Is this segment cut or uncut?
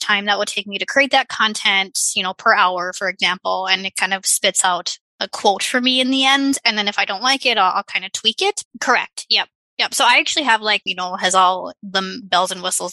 cut